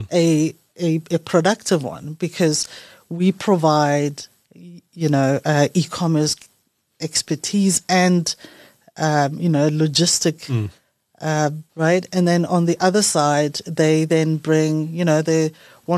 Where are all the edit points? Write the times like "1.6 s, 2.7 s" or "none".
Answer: 11.7 s

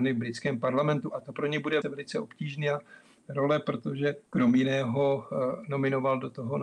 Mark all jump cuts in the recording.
1.8 s, 4.3 s

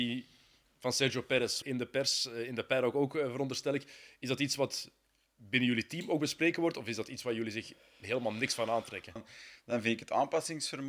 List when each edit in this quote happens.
1.6 s, 9.2 s

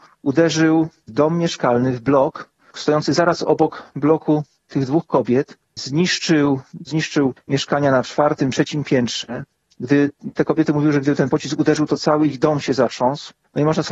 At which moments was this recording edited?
6.9 s

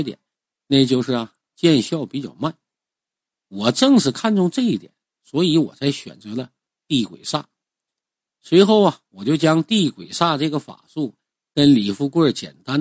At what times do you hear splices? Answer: none

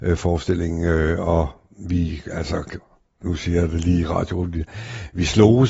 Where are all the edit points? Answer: none

